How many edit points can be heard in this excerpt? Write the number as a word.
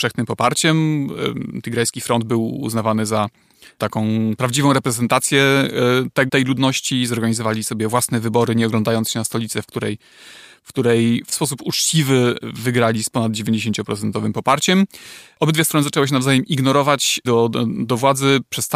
three